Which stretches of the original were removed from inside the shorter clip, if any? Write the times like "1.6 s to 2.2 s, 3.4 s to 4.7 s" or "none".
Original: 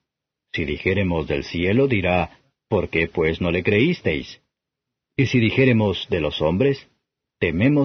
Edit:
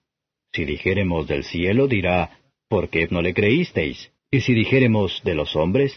3.1 s to 3.4 s, 4.5 s to 5.0 s